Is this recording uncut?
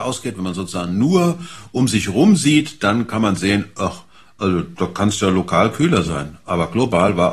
yes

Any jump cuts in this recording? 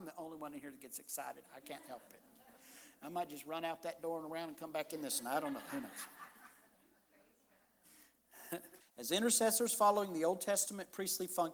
yes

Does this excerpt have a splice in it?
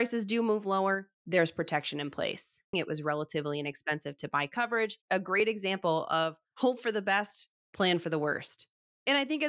yes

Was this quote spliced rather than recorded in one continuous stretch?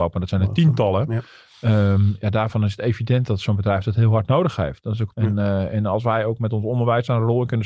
yes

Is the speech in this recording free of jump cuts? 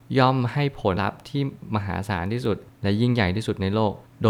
no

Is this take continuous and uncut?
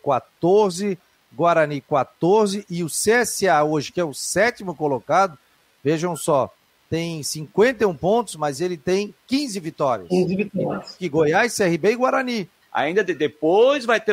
no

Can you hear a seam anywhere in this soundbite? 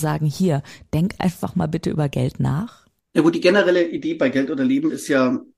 no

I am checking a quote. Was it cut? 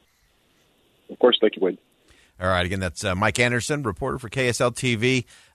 no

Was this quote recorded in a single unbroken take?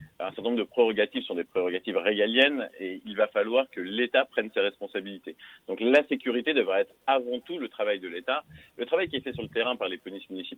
yes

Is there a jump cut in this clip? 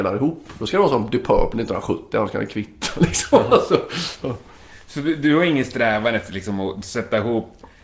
no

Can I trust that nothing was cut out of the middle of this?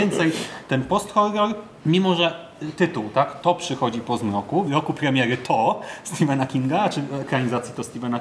no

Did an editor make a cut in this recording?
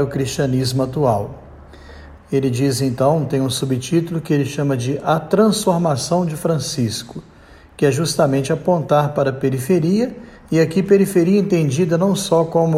yes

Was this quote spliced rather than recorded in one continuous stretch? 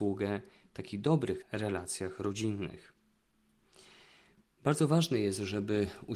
yes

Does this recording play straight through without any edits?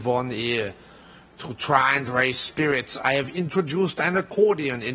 yes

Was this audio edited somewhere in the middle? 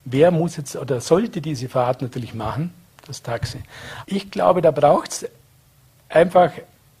yes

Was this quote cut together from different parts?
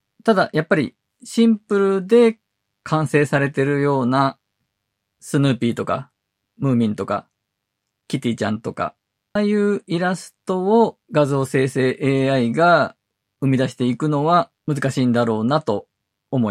yes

